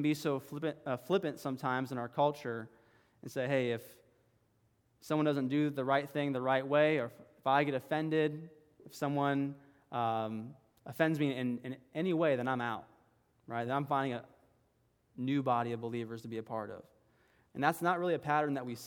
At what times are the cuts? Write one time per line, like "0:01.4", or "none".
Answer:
none